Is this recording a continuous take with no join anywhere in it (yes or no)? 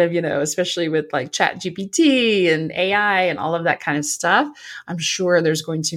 yes